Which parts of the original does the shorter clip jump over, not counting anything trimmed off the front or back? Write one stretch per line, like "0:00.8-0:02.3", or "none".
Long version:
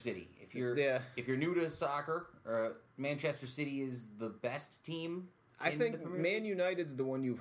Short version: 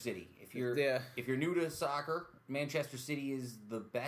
0:02.4-0:02.9